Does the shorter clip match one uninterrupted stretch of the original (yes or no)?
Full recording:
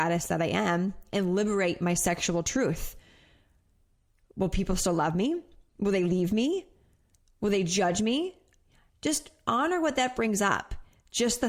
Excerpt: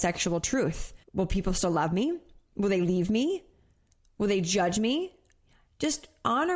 no